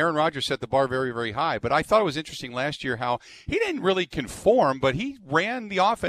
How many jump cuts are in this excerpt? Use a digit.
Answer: 0